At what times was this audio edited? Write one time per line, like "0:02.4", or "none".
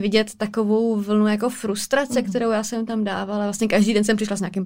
none